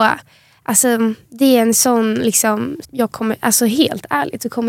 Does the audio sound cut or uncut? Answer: cut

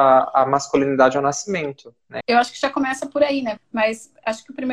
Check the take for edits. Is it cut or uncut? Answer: cut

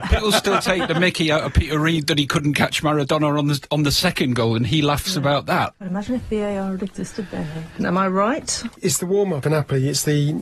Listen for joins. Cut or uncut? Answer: cut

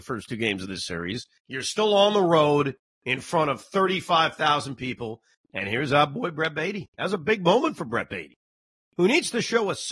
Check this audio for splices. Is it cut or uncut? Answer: cut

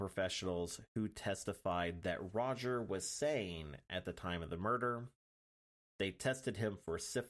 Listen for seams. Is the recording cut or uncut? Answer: uncut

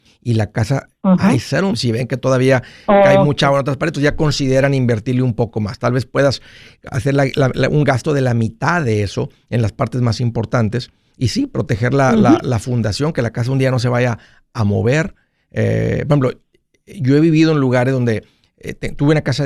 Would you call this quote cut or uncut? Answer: cut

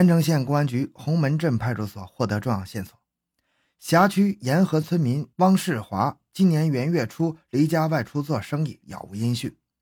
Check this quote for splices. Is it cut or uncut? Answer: cut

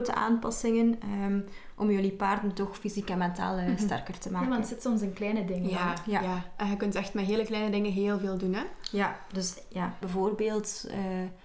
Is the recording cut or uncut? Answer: cut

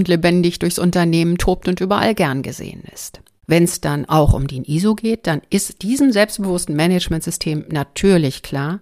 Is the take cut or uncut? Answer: cut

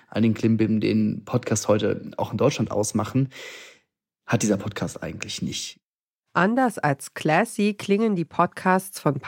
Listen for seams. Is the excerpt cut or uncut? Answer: uncut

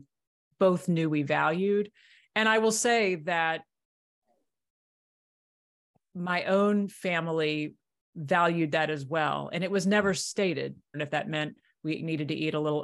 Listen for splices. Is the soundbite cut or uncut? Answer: cut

